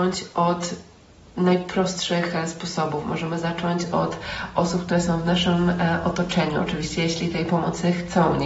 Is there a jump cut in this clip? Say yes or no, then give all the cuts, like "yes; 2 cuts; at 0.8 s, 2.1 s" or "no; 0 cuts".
no; 0 cuts